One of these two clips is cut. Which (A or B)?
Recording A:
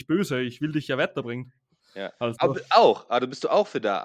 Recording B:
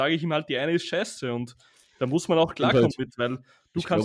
A